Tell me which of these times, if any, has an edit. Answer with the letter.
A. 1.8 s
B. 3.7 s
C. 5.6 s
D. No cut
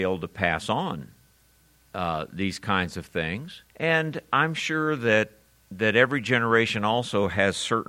B